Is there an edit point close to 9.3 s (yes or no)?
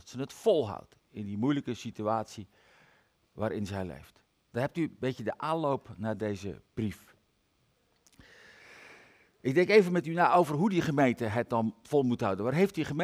no